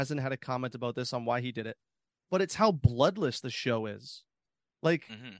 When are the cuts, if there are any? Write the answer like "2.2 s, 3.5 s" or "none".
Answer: none